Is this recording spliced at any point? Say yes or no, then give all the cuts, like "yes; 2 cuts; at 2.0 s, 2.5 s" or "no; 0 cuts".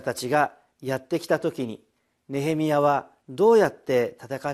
no; 0 cuts